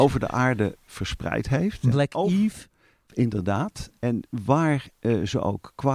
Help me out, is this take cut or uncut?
uncut